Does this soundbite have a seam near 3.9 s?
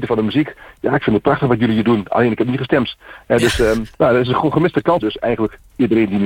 yes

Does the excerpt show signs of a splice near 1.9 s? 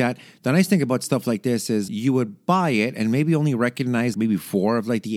yes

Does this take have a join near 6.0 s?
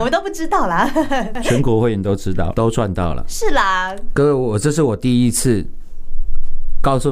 no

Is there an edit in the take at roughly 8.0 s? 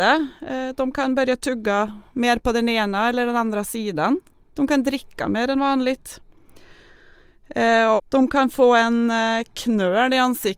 yes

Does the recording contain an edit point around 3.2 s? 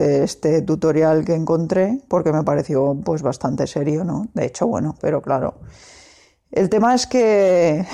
no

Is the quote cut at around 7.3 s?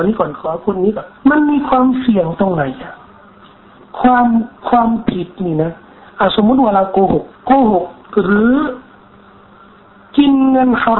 yes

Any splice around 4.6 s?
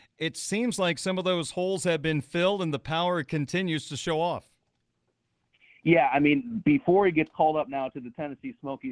no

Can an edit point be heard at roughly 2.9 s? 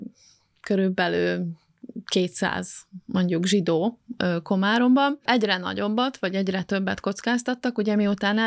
no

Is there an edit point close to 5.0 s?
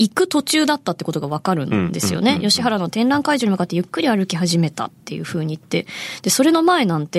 yes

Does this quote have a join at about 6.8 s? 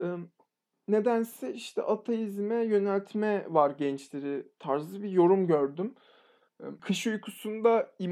yes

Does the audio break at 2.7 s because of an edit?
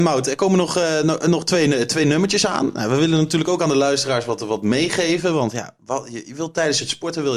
no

